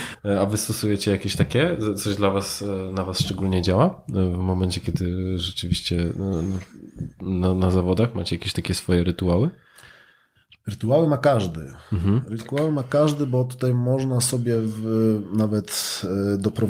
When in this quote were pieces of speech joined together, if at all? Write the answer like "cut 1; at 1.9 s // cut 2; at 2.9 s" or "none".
none